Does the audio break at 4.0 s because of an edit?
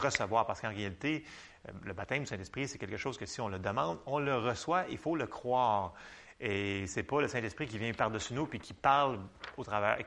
no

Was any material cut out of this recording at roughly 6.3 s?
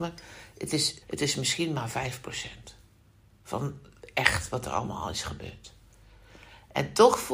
no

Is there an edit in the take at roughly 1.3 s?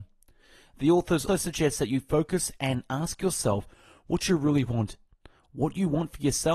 yes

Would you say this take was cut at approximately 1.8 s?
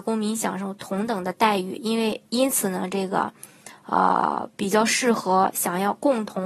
no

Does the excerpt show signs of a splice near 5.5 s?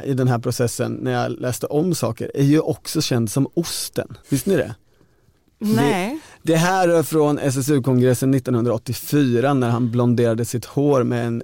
no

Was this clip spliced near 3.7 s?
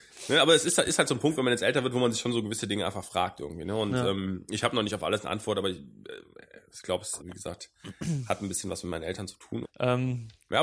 no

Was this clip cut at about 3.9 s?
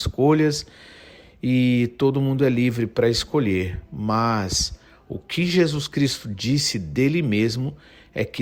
no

